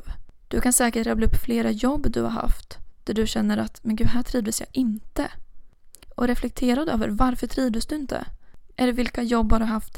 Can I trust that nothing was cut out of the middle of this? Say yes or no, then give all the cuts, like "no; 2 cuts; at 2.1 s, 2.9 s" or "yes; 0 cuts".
no; 1 cut; at 8.7 s